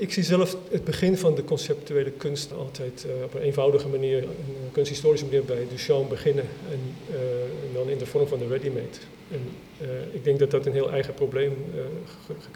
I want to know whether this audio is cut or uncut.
cut